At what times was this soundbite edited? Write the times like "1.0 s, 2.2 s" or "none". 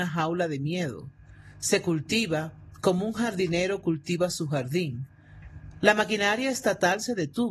5.8 s